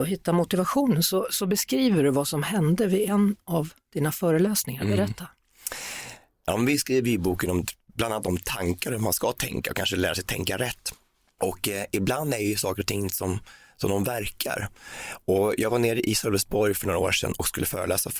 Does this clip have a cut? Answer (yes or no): no